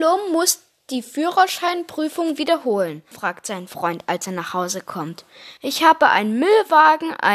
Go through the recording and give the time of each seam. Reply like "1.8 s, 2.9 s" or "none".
3.1 s, 5.6 s